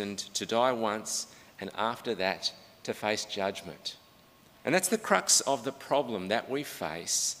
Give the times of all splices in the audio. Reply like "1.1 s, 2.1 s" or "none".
4.6 s